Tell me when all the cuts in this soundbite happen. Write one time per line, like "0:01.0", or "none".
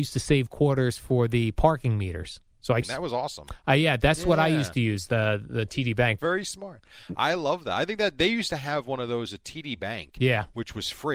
0:02.8
0:06.2